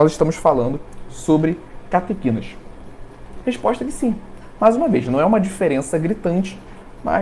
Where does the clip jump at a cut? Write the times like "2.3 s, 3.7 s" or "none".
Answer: 3.4 s, 4.6 s